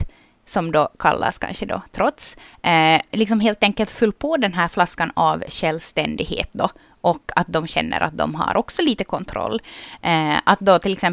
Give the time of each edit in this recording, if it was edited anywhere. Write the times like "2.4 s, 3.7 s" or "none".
3.1 s